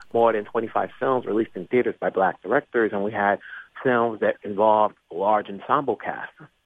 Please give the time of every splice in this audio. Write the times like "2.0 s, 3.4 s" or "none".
none